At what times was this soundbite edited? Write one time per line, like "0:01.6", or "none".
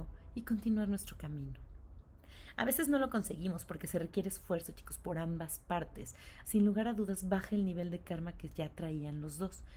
0:06.4